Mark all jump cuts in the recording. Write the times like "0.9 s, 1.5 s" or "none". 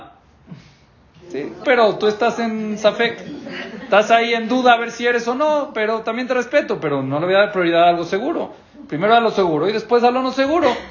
1.6 s

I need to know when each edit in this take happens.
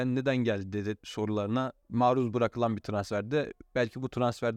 1.8 s

